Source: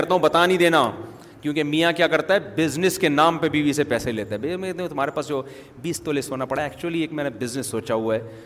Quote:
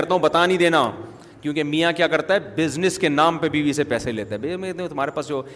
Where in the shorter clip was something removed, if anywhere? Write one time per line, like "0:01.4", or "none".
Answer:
none

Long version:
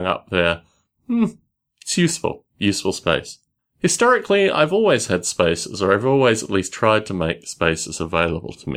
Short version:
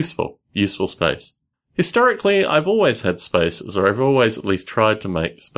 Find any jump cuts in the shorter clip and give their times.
none

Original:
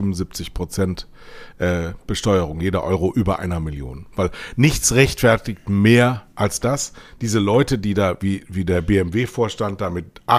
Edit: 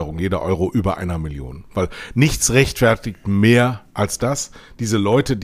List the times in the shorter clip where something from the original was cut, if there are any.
none

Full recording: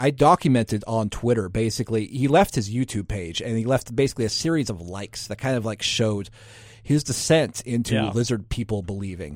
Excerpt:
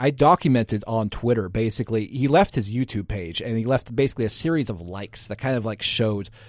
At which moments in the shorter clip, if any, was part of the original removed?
none

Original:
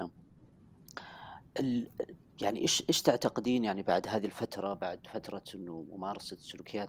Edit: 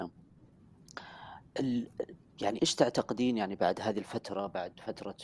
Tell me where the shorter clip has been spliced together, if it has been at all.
0:02.6

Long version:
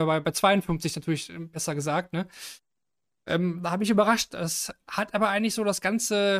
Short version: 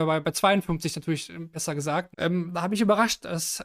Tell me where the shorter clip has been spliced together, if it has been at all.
0:02.1

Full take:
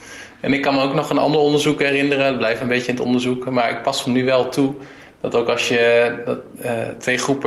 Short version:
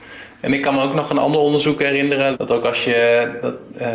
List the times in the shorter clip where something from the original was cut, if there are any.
0:02.3

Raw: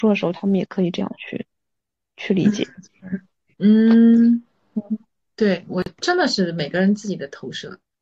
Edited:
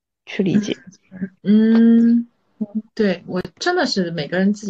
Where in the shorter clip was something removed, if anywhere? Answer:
0:01.4
0:02.9

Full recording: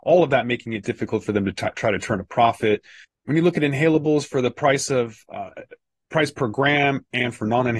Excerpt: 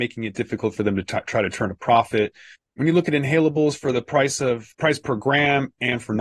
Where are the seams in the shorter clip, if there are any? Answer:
0:04.7

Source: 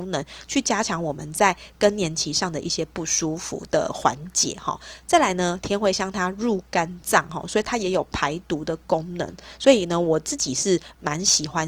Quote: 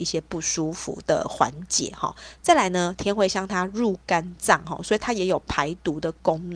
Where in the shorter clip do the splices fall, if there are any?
none

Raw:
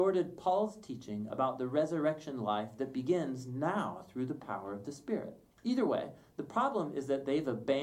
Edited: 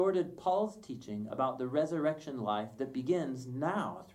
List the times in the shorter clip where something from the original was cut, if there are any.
none

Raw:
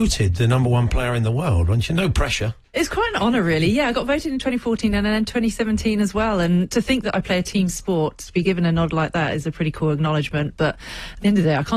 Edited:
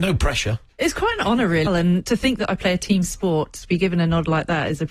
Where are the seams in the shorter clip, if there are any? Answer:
0:01.7

